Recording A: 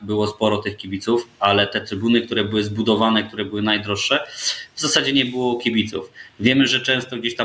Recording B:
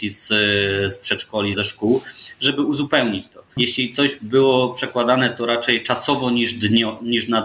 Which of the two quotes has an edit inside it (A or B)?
B